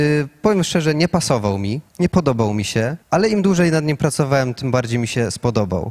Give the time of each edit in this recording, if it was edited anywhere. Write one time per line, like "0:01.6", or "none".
0:01.9
0:03.0